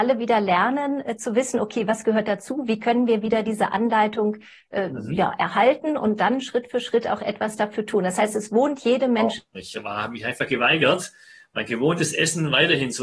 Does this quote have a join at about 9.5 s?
yes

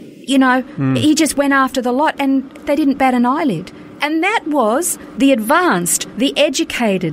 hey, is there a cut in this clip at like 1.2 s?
no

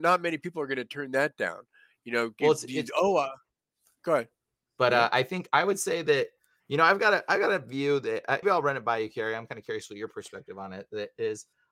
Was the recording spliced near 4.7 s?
yes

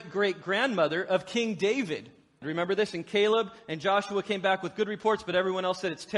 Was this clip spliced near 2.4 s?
yes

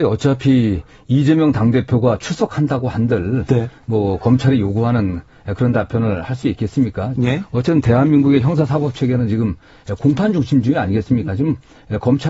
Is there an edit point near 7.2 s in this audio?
yes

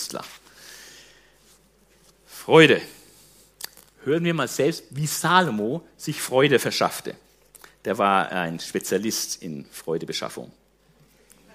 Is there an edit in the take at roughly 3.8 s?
no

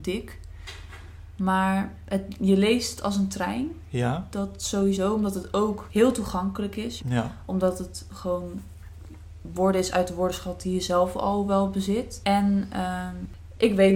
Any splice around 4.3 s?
no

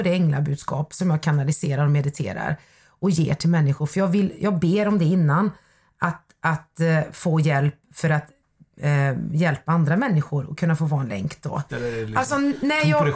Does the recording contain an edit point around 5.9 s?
no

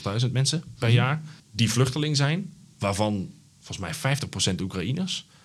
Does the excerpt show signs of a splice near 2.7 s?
no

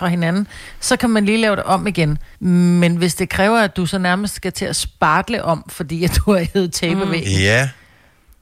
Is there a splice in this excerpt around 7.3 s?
no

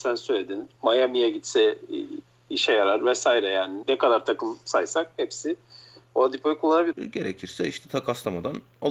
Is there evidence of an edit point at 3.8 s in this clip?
yes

